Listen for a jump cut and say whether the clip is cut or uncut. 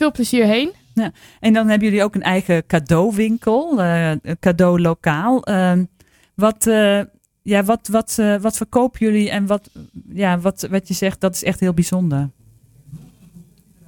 uncut